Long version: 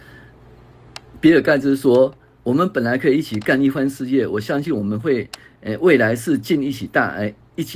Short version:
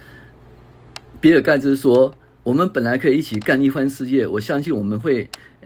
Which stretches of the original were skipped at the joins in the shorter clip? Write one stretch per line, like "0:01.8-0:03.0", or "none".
none